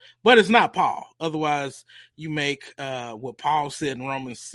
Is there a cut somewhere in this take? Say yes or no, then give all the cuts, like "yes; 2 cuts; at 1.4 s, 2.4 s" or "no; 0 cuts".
no; 0 cuts